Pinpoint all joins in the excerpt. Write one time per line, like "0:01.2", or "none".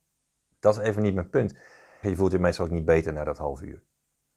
0:02.0